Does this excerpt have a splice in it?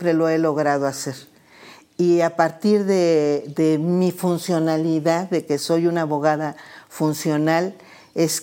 no; 0 cuts

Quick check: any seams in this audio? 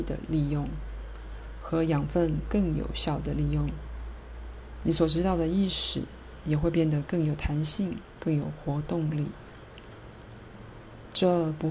no; 0 cuts

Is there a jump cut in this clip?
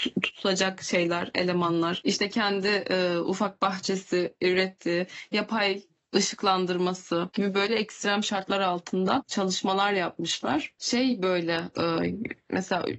yes; 2 cuts; at 7.3 s, 10.8 s

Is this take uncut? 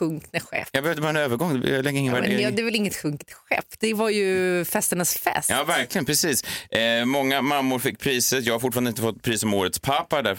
yes; 0 cuts

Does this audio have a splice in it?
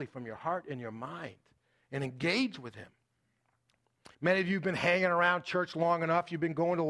yes; 1 cut; at 4.1 s

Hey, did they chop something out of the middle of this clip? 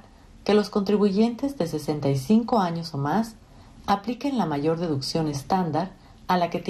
no; 0 cuts

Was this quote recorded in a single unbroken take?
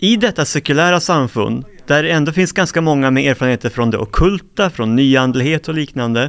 yes; 0 cuts

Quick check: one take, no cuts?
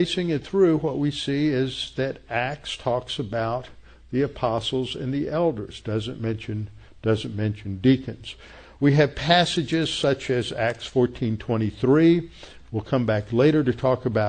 yes; 0 cuts

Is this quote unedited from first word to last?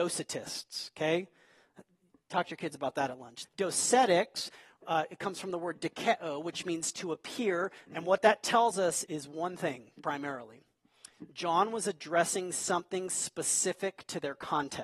no; 3 cuts; at 3.4 s, 7.9 s, 9.0 s

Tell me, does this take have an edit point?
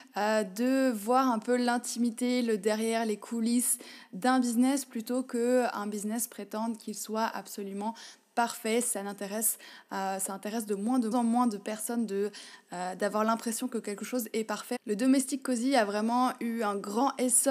yes; 2 cuts; at 11.1 s, 14.8 s

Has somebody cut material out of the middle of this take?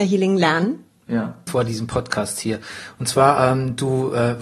yes; 1 cut; at 1.5 s

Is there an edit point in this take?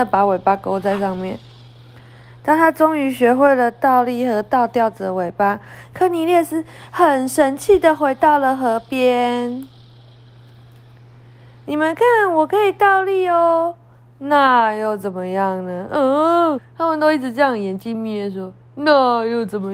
yes; 2 cuts; at 16.6 s, 17.9 s

